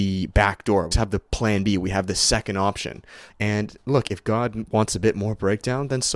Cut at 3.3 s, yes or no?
yes